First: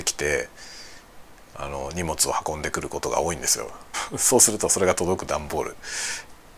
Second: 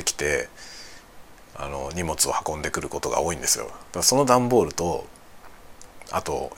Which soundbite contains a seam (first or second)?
first